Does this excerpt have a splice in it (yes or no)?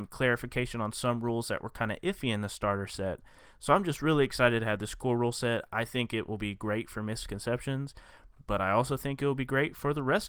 no